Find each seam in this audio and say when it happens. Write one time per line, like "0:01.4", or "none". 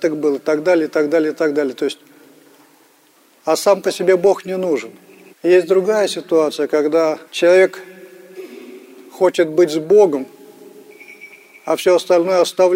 0:05.3
0:07.3